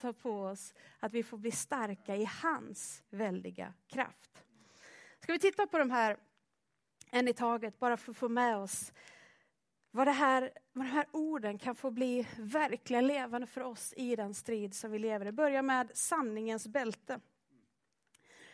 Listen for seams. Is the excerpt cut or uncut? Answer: uncut